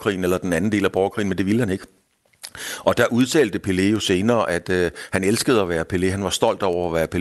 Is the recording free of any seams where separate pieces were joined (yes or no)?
yes